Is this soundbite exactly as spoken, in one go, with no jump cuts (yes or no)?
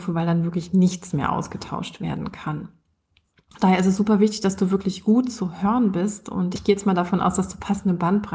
yes